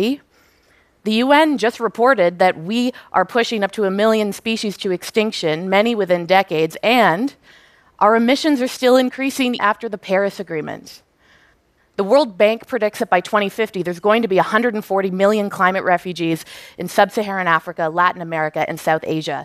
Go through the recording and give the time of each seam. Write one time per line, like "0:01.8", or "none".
0:09.6
0:11.8